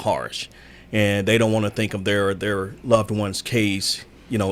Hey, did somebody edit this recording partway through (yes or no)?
no